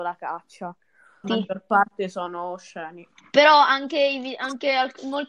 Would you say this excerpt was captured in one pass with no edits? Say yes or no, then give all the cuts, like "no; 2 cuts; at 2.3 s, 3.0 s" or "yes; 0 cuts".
no; 1 cut; at 1.2 s